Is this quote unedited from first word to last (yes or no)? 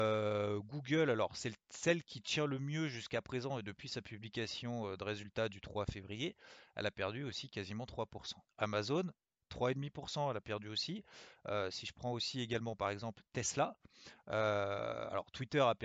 no